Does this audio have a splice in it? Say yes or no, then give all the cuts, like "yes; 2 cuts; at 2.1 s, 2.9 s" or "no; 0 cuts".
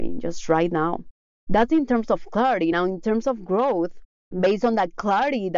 no; 0 cuts